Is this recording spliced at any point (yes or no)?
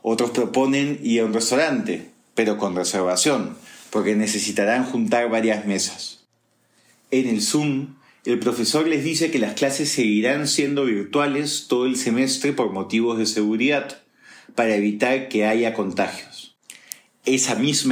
no